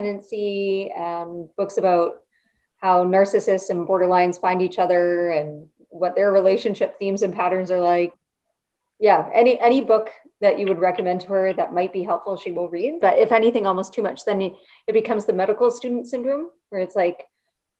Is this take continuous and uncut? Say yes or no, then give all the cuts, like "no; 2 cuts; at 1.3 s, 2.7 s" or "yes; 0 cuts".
no; 2 cuts; at 8.1 s, 13.0 s